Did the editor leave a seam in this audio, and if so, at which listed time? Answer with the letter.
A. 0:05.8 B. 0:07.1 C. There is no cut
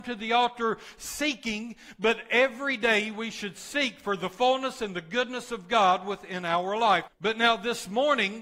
B